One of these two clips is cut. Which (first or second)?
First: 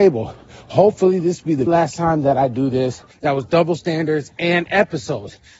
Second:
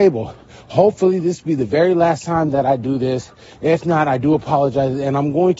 first